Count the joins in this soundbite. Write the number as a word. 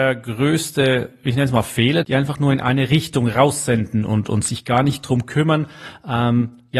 one